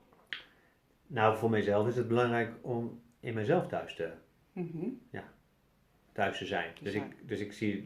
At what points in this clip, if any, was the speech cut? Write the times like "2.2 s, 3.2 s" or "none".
none